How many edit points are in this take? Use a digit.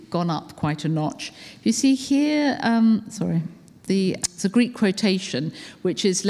1